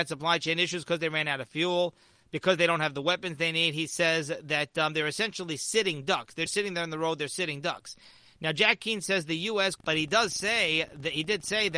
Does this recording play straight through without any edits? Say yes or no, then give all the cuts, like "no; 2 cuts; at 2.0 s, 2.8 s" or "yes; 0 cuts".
no; 2 cuts; at 6.5 s, 9.8 s